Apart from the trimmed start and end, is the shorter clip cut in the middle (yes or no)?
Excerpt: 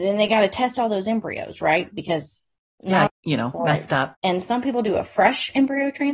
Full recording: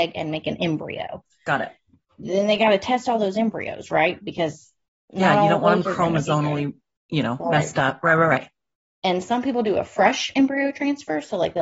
yes